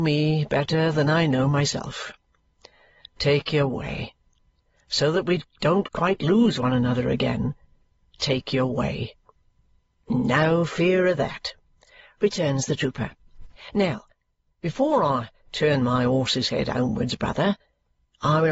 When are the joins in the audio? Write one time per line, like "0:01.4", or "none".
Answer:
none